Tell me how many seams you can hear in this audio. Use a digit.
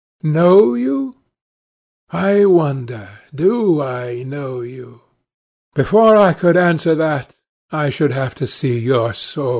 0